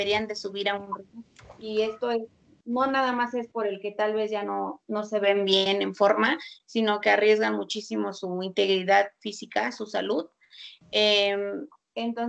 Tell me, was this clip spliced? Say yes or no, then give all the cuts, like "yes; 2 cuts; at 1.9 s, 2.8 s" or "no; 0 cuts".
no; 0 cuts